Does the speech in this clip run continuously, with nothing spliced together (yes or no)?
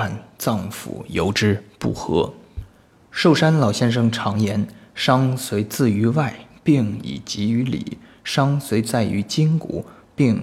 yes